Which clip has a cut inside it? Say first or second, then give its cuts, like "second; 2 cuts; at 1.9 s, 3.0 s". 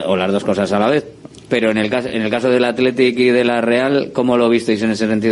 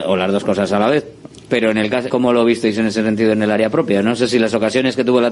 second; 1 cut; at 2.1 s